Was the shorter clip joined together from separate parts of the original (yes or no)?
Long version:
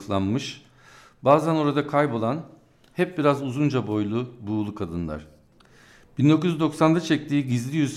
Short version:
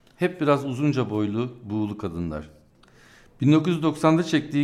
no